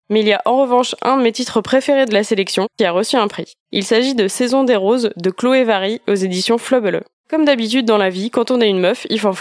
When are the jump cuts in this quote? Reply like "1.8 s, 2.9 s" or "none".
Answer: 7.2 s